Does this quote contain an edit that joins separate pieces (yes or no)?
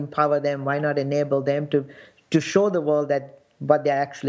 no